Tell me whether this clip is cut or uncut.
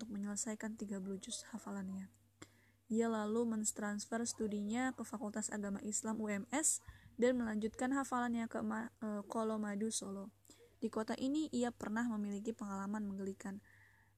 cut